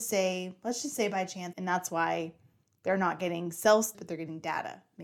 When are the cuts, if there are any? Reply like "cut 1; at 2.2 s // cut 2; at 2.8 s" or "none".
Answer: cut 1; at 1.5 s // cut 2; at 3.9 s

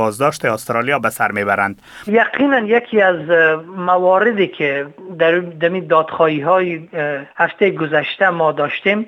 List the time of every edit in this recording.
cut 1; at 2.1 s // cut 2; at 7.3 s

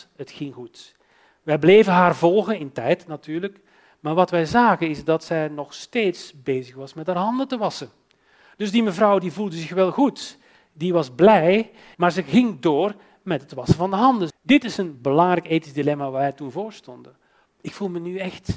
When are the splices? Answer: cut 1; at 11.9 s // cut 2; at 14.3 s // cut 3; at 17.5 s

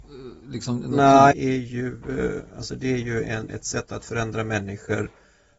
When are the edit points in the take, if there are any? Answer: cut 1; at 1.3 s // cut 2; at 3.5 s

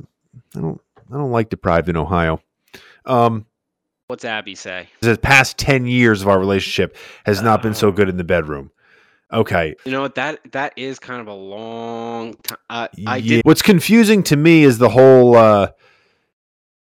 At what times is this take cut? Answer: cut 1; at 5.0 s // cut 2; at 9.8 s // cut 3; at 13.4 s

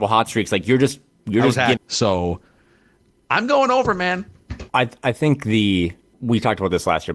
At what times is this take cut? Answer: cut 1; at 1.8 s // cut 2; at 4.7 s // cut 3; at 6.1 s

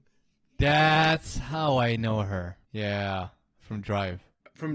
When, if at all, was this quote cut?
cut 1; at 2.6 s

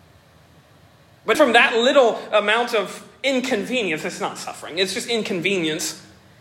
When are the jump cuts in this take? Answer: cut 1; at 1.3 s

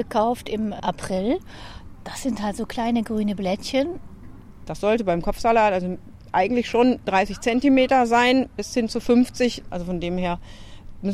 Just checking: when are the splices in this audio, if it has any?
cut 1; at 4.6 s // cut 2; at 9.7 s

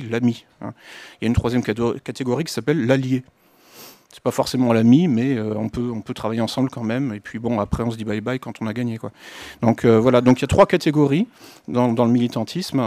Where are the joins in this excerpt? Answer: none

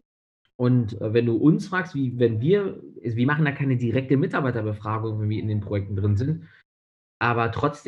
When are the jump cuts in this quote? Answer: none

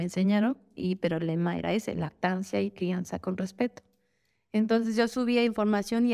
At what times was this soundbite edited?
none

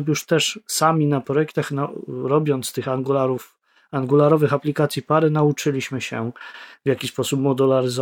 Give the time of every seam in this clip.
none

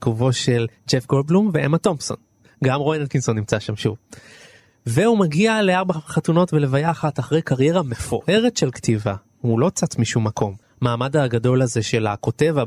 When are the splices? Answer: cut 1; at 10.6 s

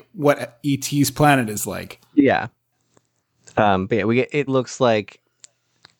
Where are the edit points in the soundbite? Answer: cut 1; at 4.5 s

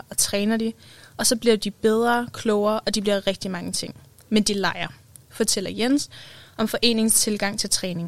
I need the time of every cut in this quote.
none

